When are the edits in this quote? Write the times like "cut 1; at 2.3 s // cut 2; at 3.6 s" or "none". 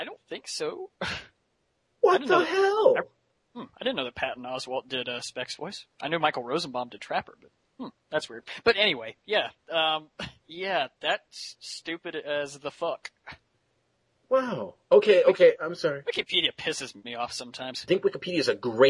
cut 1; at 10.4 s